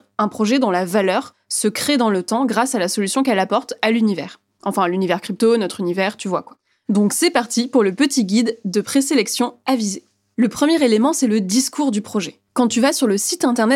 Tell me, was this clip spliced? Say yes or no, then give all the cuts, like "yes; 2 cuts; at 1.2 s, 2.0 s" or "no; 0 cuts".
no; 0 cuts